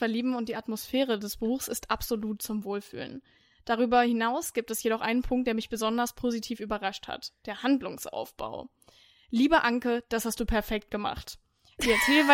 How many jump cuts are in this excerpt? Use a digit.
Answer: 0